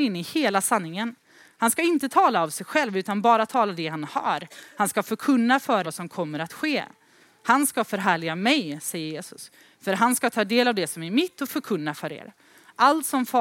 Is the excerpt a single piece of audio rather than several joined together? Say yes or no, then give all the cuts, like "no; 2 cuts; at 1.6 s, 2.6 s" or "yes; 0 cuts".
no; 1 cut; at 5.8 s